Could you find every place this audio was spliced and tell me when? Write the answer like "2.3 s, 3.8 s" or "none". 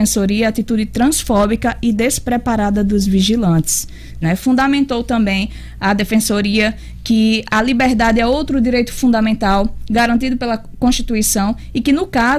4.2 s